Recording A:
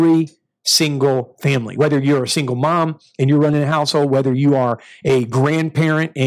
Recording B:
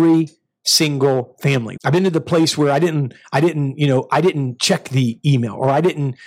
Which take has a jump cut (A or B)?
B